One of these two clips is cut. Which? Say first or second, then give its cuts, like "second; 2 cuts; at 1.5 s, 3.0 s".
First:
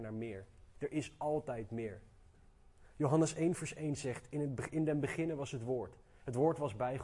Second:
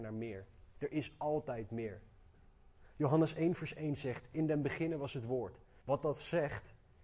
second; 2 cuts; at 4.3 s, 5.8 s